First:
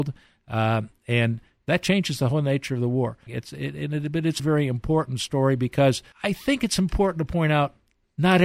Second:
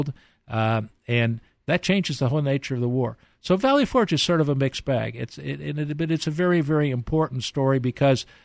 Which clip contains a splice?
first; 3 cuts; at 3.3 s, 4.4 s, 6.1 s

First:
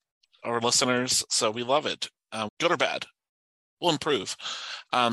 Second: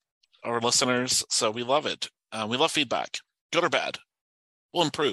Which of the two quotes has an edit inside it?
first; 1 cut; at 2.5 s

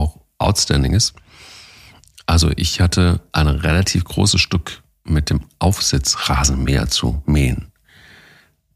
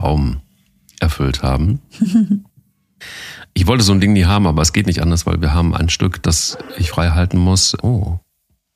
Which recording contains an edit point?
second; 1 cut; at 7.8 s

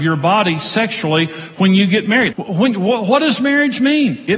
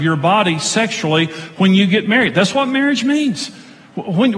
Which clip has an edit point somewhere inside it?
first; 1 cut; at 2.3 s

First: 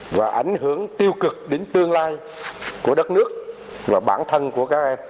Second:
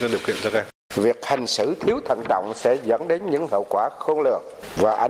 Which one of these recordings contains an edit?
second; 1 cut; at 0.9 s

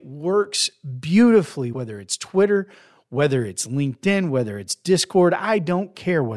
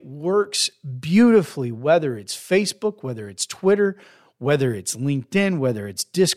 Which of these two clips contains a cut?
first; 1 cut; at 1.7 s

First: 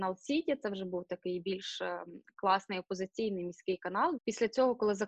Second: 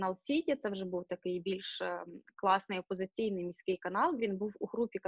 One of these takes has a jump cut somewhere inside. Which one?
first; 1 cut; at 4.2 s

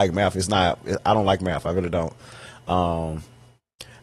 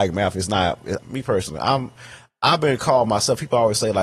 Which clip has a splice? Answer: second; 1 cut; at 1.0 s

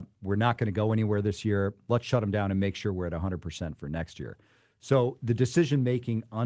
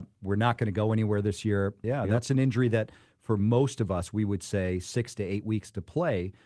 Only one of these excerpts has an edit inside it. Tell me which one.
second; 1 cut; at 1.8 s

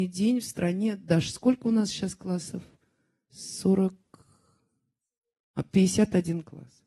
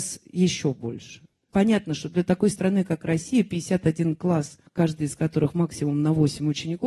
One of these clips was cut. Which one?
second; 2 cuts; at 1.5 s, 4.7 s

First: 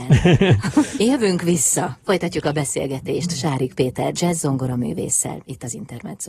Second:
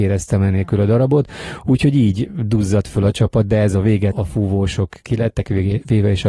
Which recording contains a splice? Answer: second; 1 cut; at 4.1 s

